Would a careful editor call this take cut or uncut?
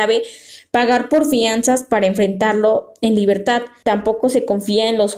cut